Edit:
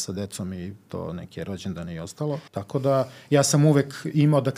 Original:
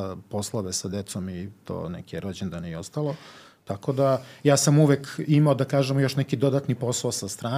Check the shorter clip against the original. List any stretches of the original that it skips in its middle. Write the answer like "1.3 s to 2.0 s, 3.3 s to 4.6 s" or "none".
3.2 s to 3.6 s